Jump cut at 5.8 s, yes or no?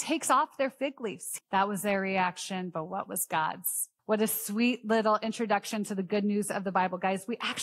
no